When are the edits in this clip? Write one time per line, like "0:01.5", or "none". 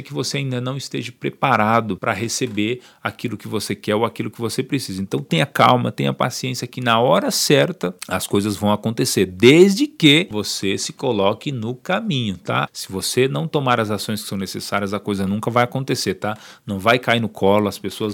0:12.7